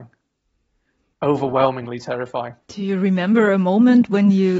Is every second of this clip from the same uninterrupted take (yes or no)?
no